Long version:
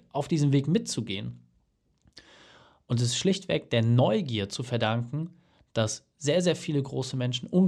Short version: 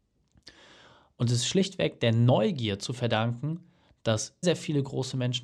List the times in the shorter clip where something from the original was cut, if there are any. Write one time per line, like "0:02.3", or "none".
0:04.4